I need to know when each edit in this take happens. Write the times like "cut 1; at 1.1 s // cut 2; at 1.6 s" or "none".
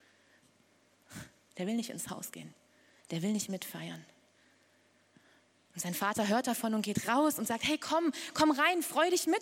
none